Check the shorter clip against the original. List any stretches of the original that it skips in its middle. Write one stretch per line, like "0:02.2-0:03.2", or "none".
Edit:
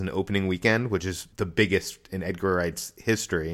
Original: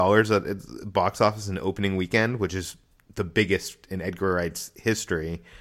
0:02.8-0:03.1